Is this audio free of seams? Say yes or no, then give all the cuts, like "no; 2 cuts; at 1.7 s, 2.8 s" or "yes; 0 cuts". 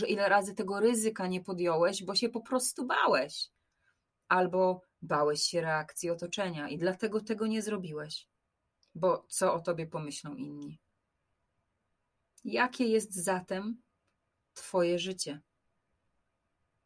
yes; 0 cuts